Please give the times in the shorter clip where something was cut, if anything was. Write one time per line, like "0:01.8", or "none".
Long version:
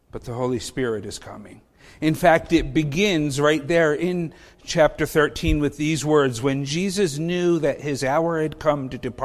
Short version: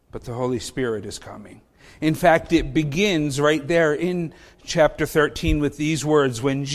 none

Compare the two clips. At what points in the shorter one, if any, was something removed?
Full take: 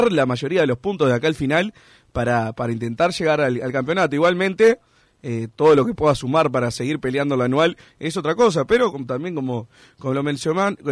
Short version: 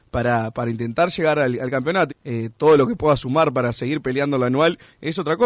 0:02.1

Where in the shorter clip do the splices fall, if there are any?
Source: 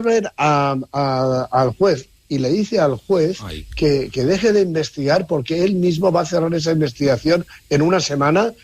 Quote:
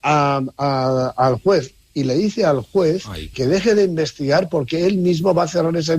0:03.3

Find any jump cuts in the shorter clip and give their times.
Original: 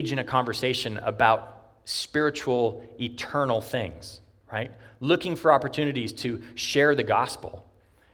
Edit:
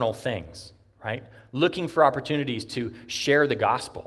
none

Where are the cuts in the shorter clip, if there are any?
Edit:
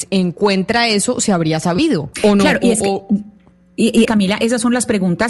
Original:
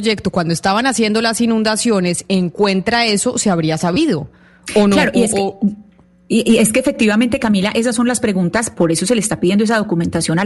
0:02.1
0:04.1

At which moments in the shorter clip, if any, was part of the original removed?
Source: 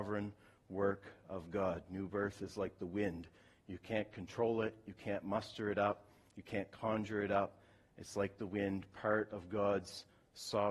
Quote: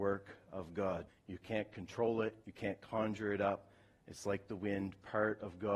0:01.1
0:02.4

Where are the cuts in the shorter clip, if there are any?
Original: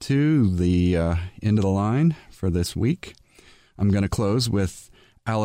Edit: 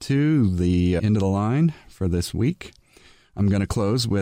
0:01.0

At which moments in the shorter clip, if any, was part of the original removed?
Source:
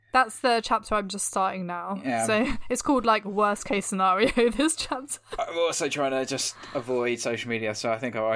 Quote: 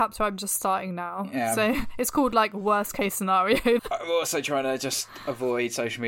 0:03.8

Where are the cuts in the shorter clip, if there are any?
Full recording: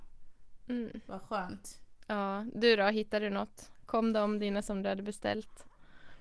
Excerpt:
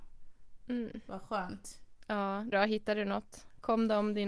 0:02.5

